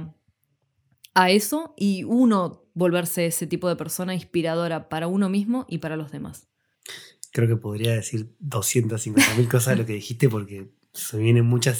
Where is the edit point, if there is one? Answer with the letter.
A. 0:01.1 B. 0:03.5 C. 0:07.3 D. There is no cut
D